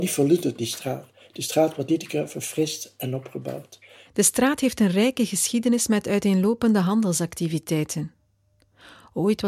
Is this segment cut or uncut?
cut